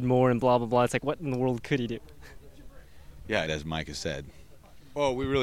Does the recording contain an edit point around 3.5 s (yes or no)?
yes